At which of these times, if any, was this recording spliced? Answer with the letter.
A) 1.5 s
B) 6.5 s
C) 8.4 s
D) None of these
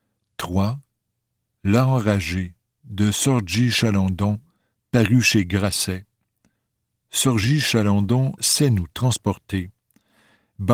C